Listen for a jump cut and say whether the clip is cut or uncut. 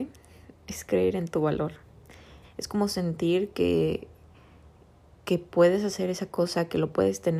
cut